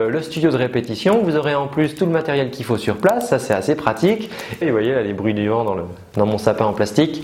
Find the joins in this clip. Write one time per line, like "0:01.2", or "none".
0:04.6